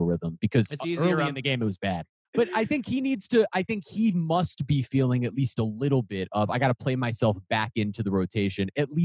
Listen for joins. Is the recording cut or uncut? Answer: cut